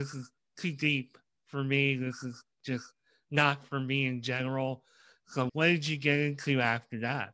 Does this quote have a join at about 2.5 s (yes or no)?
no